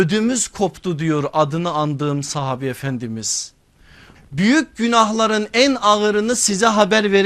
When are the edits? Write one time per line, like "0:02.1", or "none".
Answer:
0:04.1